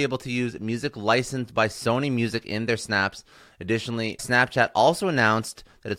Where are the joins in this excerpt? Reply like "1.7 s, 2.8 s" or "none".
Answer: 4.2 s